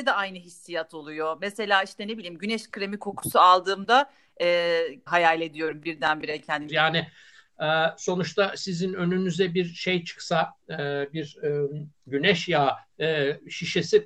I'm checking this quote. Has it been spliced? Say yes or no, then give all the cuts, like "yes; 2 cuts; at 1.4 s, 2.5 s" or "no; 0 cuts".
yes; 2 cuts; at 5.1 s, 6.7 s